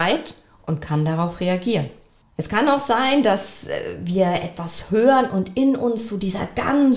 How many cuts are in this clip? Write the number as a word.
zero